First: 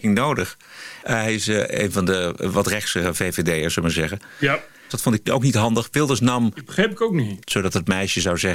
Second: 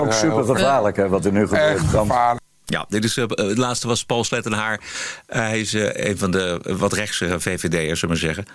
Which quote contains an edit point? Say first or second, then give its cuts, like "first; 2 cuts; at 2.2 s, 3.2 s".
first; 3 cuts; at 1.0 s, 4.9 s, 7.4 s